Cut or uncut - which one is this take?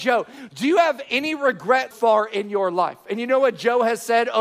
cut